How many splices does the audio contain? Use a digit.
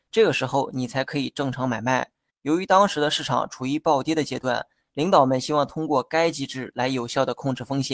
1